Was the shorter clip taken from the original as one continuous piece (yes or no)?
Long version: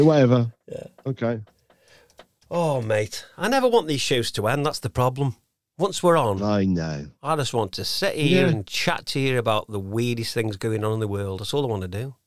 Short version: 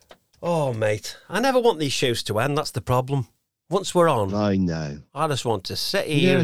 yes